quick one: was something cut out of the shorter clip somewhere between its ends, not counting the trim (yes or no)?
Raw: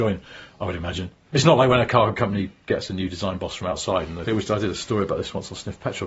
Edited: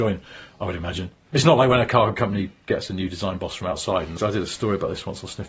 yes